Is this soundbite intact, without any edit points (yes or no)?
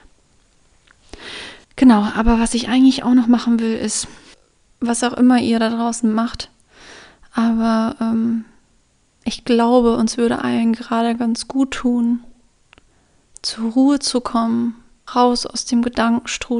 no